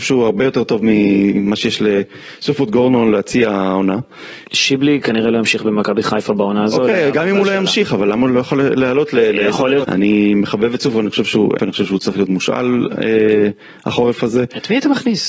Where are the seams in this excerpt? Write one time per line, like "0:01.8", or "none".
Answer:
0:04.4
0:09.8
0:11.6